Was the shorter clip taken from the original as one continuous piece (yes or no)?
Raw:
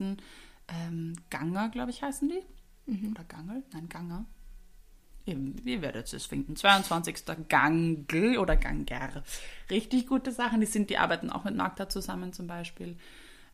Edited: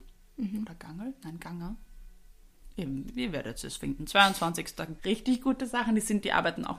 no